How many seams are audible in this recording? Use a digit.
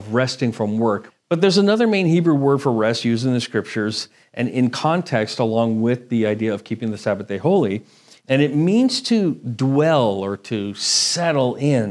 2